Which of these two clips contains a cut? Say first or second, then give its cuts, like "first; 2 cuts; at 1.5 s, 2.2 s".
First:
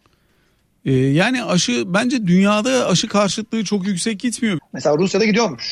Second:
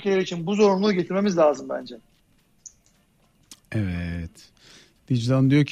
first; 1 cut; at 4.6 s